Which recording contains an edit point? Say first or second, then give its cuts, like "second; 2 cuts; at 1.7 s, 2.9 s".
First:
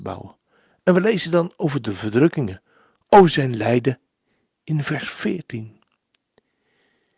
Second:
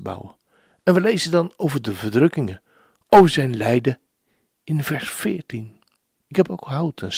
second; 1 cut; at 6.1 s